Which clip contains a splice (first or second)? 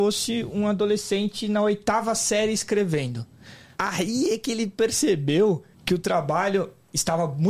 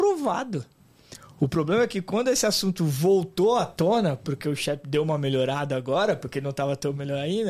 first